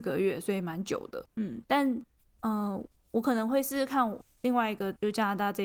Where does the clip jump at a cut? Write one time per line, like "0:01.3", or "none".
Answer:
0:01.3